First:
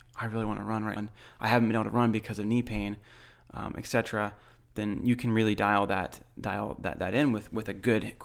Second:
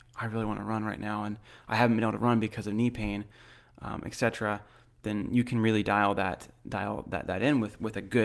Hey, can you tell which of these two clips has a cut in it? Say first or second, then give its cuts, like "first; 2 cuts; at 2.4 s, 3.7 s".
first; 1 cut; at 1.0 s